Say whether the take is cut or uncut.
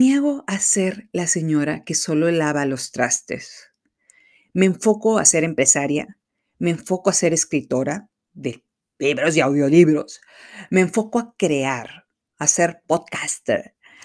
uncut